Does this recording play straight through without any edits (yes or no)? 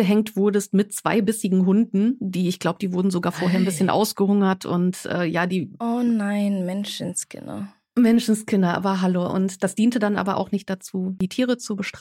yes